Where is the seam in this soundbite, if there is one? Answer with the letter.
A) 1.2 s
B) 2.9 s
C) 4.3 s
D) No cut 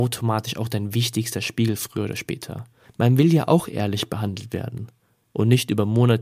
B